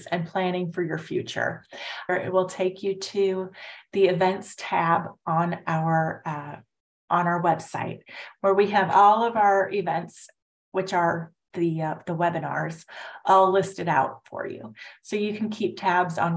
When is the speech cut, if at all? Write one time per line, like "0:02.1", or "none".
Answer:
0:02.1